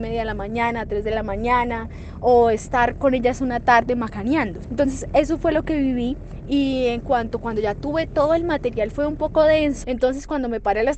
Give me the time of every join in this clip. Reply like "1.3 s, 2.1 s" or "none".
4.6 s, 9.8 s